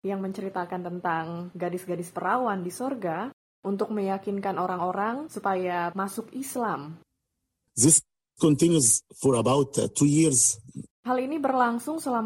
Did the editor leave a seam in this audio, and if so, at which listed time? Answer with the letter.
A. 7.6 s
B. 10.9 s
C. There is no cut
B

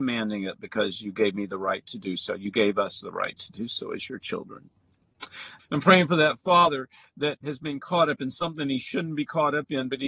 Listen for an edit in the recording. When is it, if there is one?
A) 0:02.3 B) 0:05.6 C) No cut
B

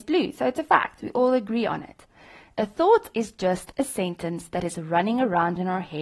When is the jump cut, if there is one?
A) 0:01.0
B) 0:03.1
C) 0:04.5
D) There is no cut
B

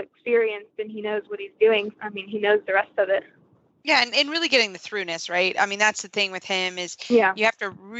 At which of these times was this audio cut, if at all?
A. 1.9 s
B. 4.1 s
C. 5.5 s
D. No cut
A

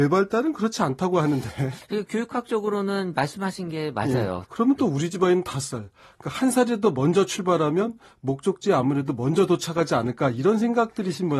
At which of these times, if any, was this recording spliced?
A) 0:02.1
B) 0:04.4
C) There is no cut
B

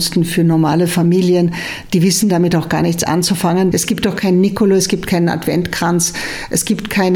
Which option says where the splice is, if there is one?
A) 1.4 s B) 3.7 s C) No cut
B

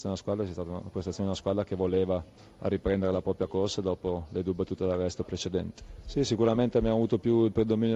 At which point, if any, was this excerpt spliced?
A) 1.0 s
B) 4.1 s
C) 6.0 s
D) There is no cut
C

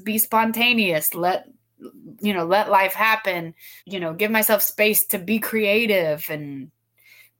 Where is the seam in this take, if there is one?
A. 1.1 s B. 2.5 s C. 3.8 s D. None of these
C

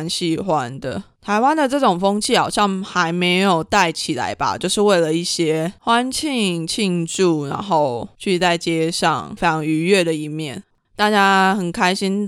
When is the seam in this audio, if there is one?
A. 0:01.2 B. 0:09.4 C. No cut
B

